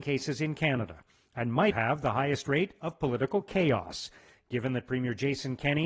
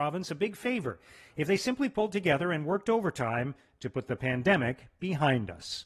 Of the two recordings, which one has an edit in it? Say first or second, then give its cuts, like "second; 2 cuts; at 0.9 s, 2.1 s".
first; 1 cut; at 1.7 s